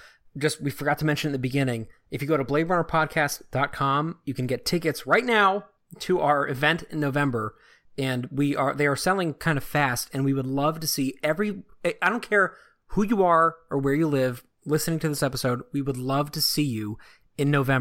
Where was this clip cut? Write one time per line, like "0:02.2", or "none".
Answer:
none